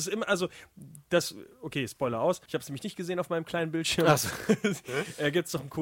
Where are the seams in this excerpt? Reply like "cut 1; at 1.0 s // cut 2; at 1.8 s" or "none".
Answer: cut 1; at 2.5 s